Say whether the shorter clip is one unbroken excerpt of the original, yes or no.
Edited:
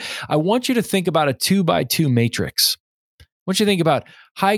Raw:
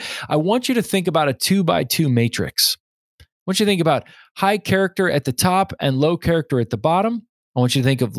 yes